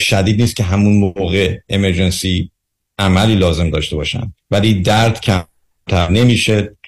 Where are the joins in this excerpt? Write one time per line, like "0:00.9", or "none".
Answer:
0:04.4